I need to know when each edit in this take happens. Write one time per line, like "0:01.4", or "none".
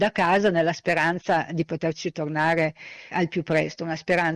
0:03.1